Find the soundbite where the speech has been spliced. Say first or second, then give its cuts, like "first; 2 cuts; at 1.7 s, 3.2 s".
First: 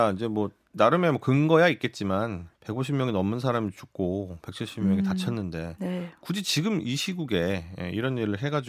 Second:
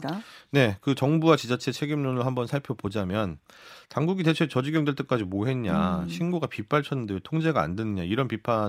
first; 1 cut; at 2.6 s